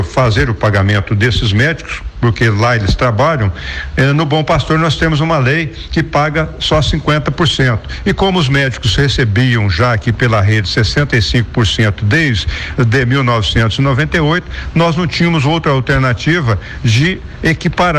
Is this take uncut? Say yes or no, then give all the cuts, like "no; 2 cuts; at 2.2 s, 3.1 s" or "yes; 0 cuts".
yes; 0 cuts